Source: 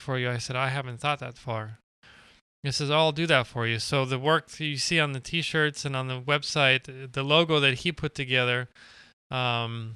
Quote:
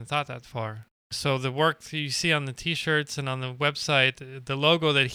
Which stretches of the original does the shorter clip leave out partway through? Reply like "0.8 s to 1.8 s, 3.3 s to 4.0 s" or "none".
2.0 s to 3.8 s